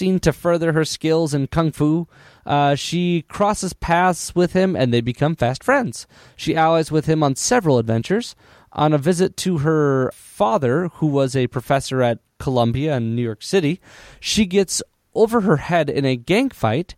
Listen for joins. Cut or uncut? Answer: cut